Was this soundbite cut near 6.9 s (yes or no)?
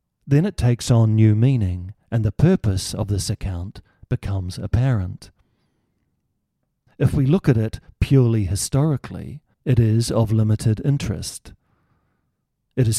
yes